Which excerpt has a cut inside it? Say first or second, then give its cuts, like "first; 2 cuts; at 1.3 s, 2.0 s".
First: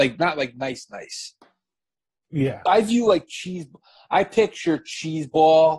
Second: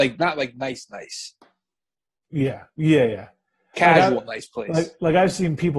first; 1 cut; at 2.7 s